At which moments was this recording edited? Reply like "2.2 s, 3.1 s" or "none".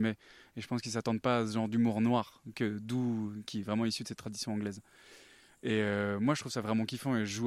none

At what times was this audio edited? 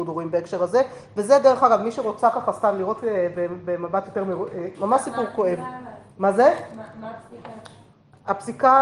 4.7 s

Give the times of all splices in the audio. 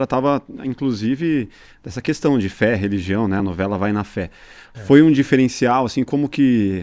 none

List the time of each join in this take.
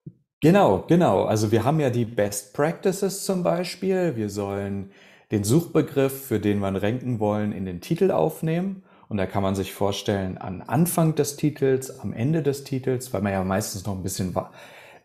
none

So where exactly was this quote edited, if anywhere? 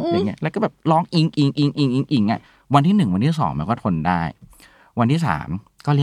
none

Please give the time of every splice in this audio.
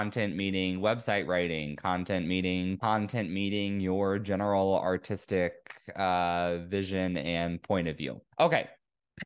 2.8 s, 8.3 s

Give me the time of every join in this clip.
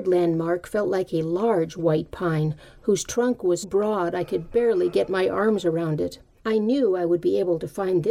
3.6 s, 6.4 s

